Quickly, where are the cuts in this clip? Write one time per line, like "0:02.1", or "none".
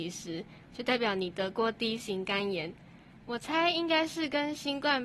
0:03.2

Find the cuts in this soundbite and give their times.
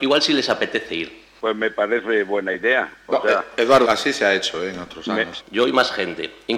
0:03.8
0:05.4

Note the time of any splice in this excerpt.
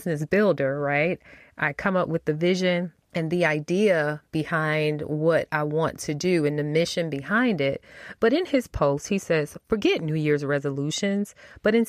0:08.2

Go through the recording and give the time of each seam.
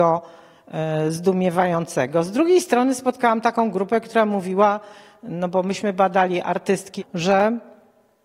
0:07.0

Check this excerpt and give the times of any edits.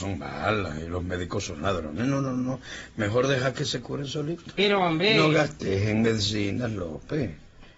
none

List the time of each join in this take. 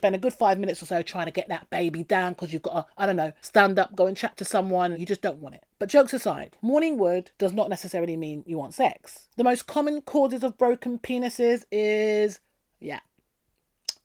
0:04.9
0:09.3

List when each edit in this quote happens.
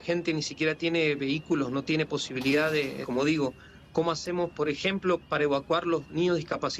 0:03.0
0:05.2

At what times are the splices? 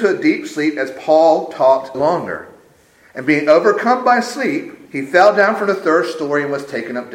0:01.9
0:04.9

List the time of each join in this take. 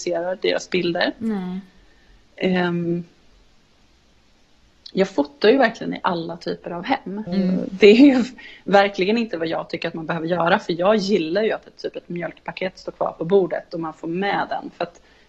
0:07.3

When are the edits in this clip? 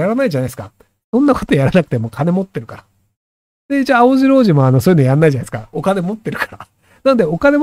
none

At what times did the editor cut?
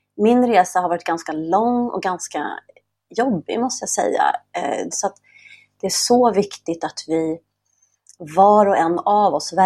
0:04.9

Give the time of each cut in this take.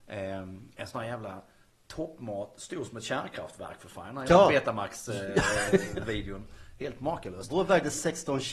none

